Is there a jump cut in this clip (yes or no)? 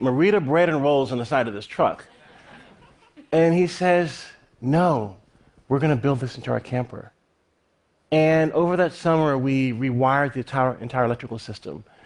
no